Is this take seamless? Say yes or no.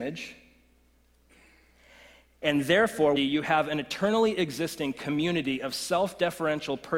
no